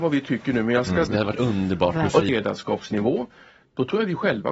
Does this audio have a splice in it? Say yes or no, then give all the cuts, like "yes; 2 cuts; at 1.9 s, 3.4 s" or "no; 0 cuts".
yes; 2 cuts; at 1.1 s, 2.3 s